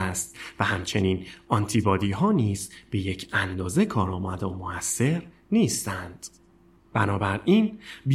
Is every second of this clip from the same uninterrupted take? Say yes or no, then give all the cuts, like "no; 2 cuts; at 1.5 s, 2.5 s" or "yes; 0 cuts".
no; 1 cut; at 6.8 s